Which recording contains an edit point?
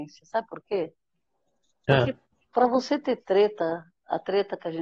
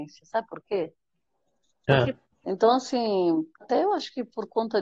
second; 2 cuts; at 2.4 s, 3.6 s

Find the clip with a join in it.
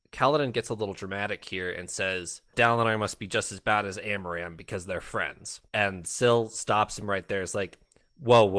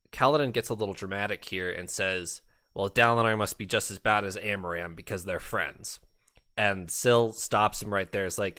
first; 2 cuts; at 2.5 s, 5.7 s

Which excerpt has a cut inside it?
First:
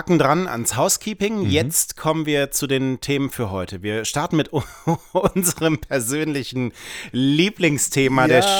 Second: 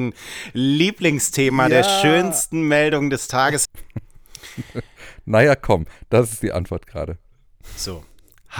second; 1 cut; at 3.7 s

